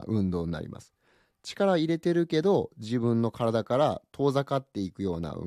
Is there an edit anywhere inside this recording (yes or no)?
no